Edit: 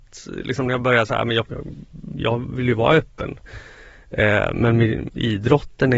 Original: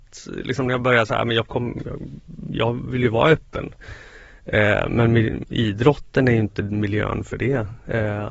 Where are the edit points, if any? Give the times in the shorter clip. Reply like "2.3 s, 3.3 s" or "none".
1.5 s